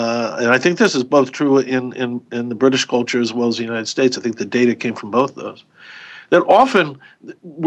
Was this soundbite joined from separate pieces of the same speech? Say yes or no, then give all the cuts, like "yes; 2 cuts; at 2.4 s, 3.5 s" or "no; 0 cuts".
no; 0 cuts